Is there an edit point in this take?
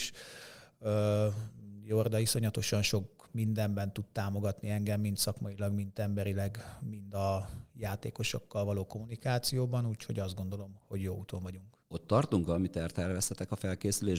yes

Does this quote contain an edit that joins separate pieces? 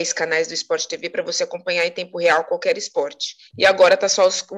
yes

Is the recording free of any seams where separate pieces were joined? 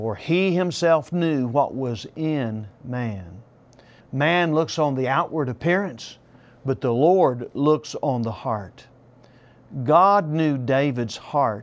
no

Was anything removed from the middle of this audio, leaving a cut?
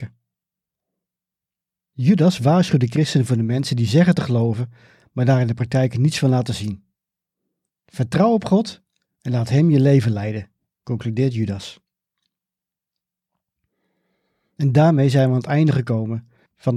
no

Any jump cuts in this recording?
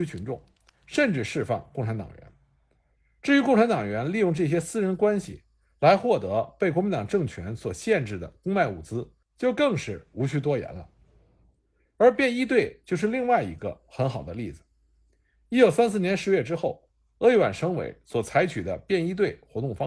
no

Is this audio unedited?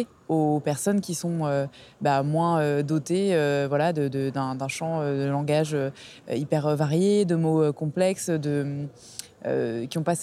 yes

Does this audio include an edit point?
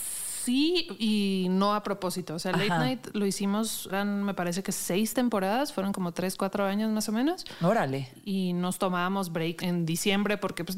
yes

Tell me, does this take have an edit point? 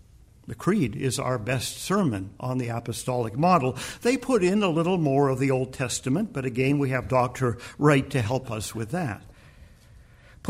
no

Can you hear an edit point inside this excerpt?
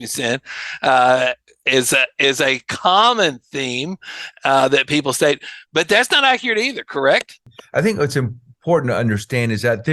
no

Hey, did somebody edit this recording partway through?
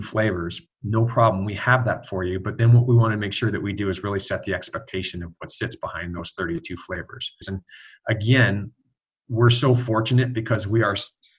yes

